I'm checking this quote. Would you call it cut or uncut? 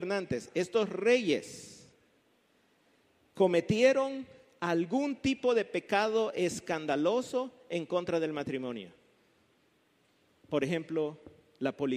uncut